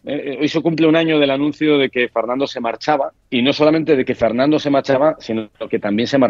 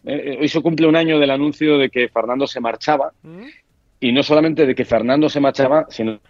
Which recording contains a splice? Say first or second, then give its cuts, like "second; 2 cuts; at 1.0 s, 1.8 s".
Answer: first; 1 cut; at 3.1 s